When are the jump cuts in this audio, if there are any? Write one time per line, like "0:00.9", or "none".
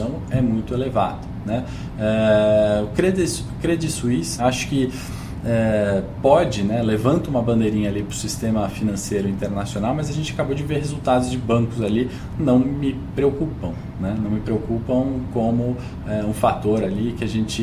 0:04.4